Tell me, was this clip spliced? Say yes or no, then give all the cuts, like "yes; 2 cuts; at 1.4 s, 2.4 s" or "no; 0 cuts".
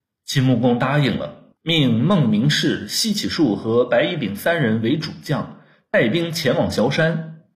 yes; 1 cut; at 1.6 s